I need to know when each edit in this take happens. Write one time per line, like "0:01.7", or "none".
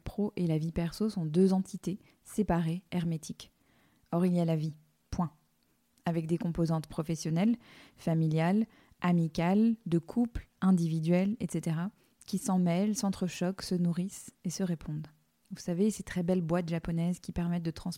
0:15.4

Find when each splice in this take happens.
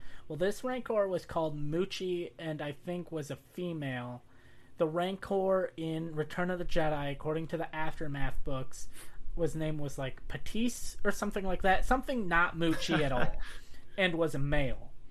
none

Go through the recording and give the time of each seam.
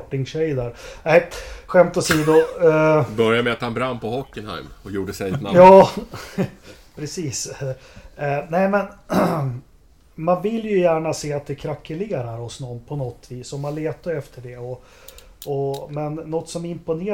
0:01.7

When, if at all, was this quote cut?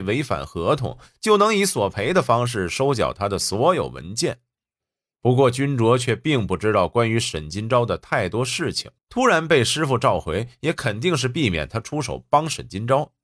0:09.0

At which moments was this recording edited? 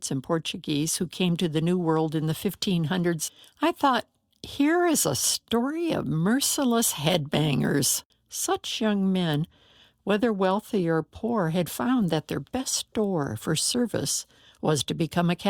0:08.1

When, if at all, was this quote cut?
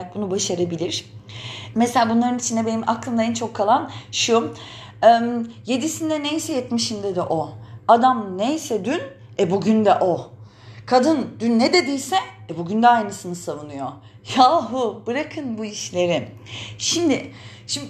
0:01.7

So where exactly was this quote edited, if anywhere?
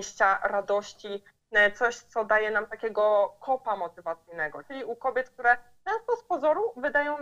0:04.6

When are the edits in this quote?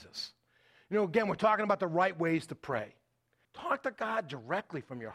0:03.4

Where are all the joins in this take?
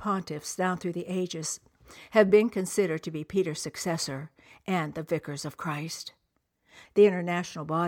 0:06.8

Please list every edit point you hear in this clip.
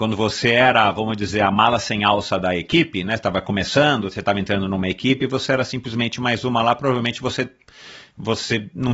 none

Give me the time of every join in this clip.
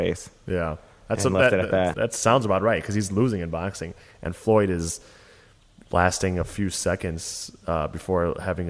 0:01.9

